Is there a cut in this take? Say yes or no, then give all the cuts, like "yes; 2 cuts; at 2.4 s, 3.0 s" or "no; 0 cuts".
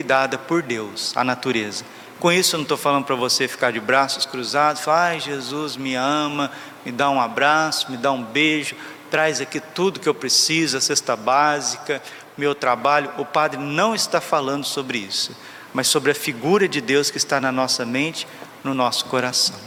yes; 1 cut; at 2.1 s